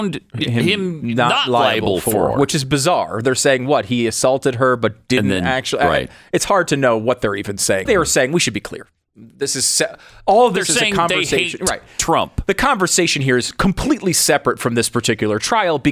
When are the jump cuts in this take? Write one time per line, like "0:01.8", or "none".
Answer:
0:07.9